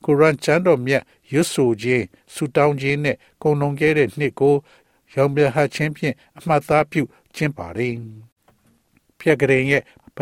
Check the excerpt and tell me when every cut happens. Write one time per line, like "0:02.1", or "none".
0:07.5